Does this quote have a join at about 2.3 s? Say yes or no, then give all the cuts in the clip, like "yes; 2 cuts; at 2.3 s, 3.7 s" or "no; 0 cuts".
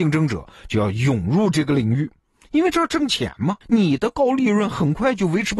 no; 1 cut; at 3.6 s